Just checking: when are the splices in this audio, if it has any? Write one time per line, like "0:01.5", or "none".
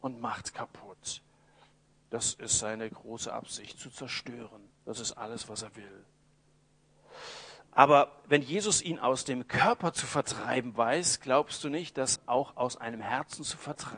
0:04.8
0:12.2